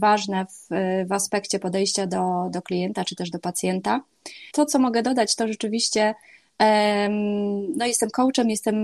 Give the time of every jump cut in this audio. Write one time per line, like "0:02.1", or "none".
0:04.5